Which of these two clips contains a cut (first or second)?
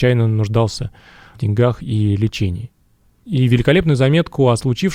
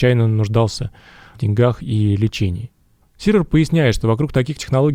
second